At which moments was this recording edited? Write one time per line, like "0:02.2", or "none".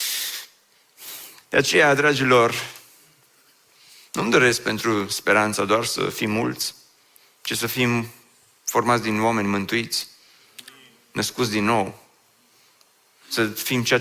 0:01.4